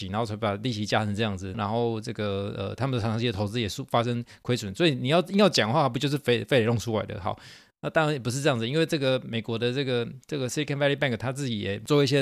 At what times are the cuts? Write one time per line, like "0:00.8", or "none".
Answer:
0:01.5